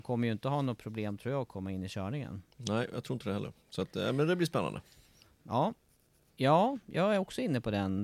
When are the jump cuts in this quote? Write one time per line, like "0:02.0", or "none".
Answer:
0:06.4